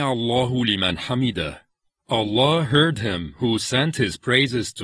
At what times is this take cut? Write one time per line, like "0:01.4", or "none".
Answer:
none

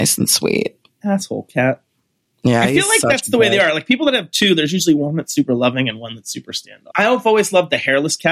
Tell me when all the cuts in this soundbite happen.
0:06.9

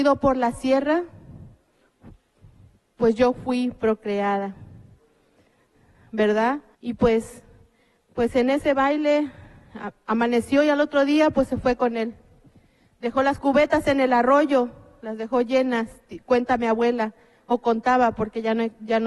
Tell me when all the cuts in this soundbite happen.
0:06.7

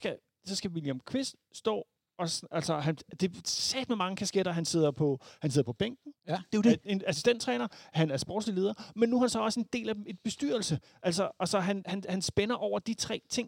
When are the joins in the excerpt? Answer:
0:11.8

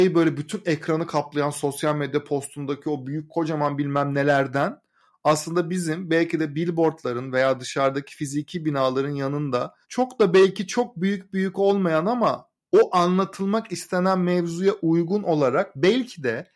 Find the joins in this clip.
0:09.8

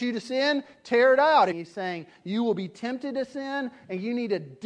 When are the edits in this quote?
0:01.5

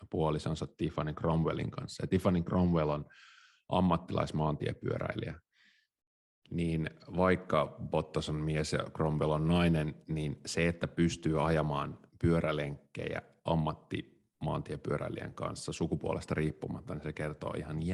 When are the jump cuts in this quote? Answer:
none

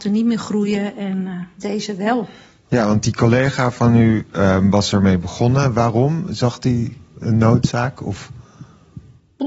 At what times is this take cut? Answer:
none

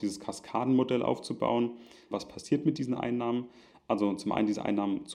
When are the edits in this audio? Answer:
0:02.1

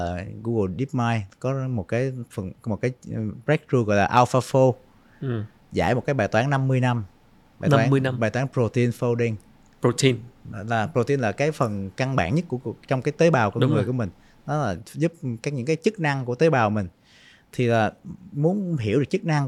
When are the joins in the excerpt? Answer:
none

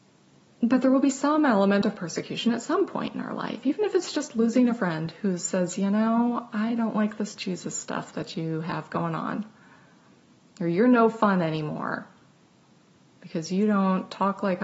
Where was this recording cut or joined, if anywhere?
none

